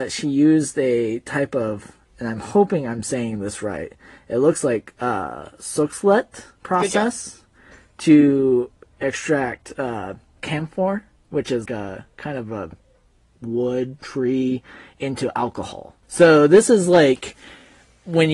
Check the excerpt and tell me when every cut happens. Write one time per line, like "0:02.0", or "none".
0:10.4
0:11.7
0:16.0